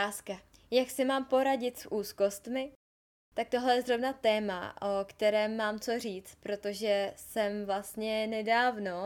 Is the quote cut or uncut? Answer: uncut